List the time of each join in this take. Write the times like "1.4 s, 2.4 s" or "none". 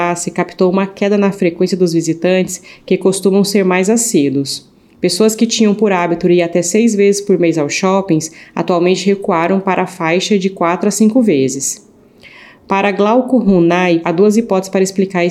14.0 s

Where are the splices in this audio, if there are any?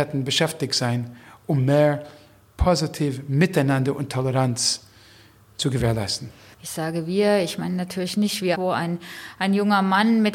6.5 s, 8.5 s

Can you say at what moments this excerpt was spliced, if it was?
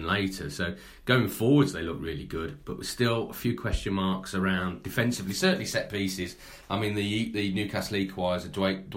none

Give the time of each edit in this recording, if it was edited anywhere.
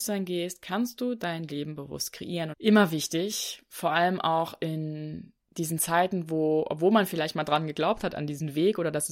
2.5 s

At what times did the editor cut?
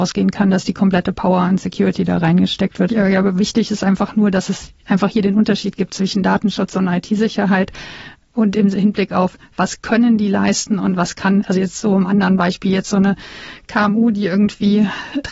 2.9 s

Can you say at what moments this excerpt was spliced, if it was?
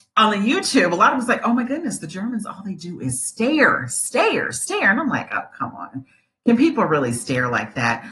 none

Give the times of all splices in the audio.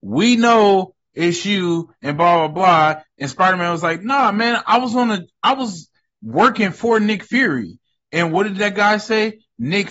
none

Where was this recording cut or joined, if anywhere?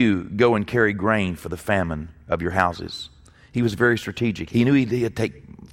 4.5 s

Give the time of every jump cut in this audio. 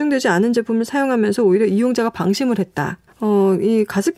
3.1 s

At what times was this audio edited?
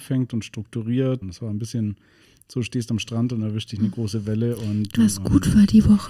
1.2 s, 5.0 s

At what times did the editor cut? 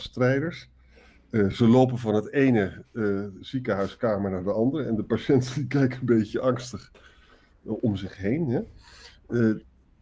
none

